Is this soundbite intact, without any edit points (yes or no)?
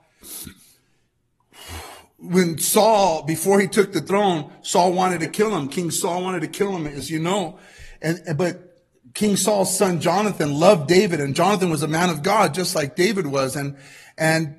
yes